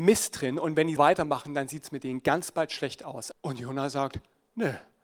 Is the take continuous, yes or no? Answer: no